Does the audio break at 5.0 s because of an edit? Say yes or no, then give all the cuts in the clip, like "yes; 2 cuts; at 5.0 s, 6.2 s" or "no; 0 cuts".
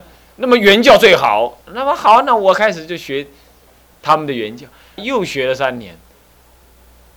yes; 1 cut; at 5.0 s